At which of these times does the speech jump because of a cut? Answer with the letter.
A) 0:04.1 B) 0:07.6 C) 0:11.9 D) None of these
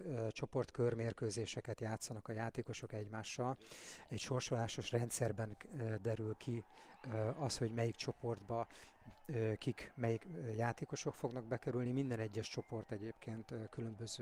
D